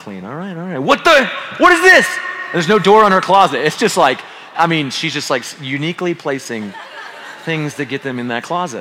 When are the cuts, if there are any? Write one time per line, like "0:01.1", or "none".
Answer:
0:04.5